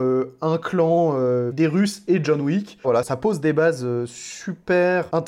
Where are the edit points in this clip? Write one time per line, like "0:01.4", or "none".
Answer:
0:01.5
0:02.8